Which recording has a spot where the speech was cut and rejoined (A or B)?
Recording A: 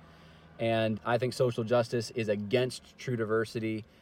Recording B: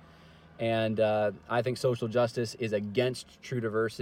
A